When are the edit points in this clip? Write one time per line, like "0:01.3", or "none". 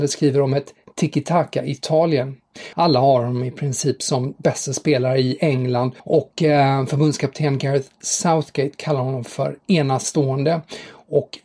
0:02.7
0:06.0